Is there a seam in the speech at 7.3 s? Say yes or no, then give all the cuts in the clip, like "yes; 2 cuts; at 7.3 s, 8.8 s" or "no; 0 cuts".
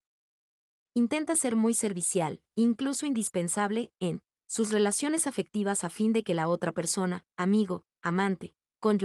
no; 0 cuts